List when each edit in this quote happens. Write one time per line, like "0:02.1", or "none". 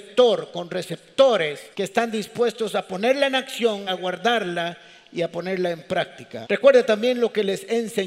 0:01.7
0:03.9
0:06.4